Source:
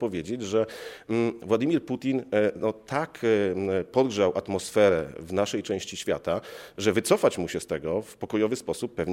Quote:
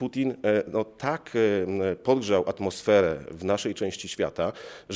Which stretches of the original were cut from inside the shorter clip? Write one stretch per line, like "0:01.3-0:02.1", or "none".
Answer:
none